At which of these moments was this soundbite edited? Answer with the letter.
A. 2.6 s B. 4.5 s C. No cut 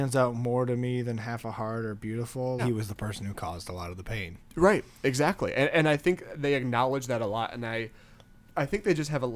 A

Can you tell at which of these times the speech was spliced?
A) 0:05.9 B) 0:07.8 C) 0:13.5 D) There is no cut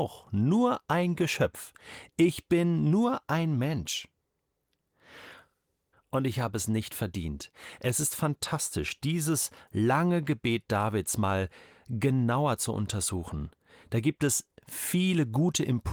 A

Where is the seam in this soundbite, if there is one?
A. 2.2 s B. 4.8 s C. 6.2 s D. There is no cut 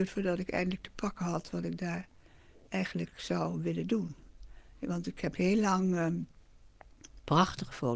D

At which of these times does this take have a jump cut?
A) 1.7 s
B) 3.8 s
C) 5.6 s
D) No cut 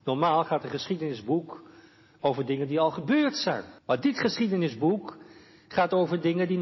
B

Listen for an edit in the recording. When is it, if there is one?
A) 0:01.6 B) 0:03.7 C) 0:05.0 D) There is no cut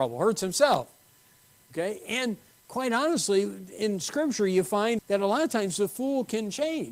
C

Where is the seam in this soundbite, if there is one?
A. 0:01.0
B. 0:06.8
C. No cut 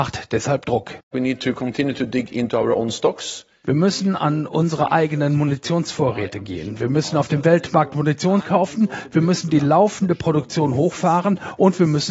C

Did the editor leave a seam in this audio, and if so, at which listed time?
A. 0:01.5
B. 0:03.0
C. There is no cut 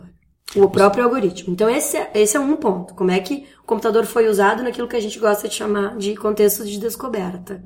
C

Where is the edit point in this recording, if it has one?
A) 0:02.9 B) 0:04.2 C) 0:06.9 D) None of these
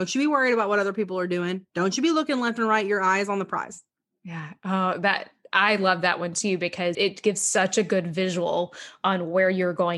C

